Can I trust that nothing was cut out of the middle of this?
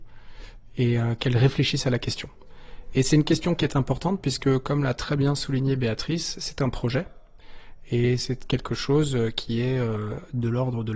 yes; 0 cuts

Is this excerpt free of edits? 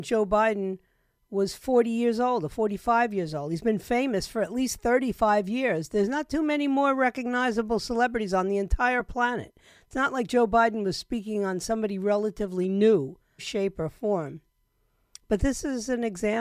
no; 1 cut; at 13.4 s

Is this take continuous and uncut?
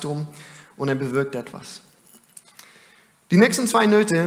yes; 0 cuts

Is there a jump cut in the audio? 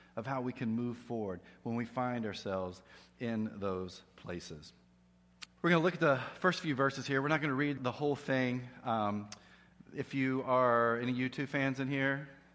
yes; 2 cuts; at 5.5 s, 7.8 s

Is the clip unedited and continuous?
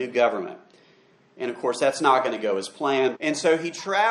no; 1 cut; at 3.1 s

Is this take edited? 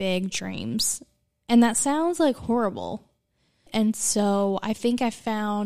yes; 1 cut; at 3.7 s

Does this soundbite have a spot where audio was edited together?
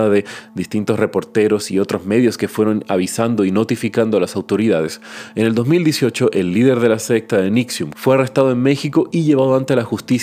yes; 1 cut; at 7.9 s

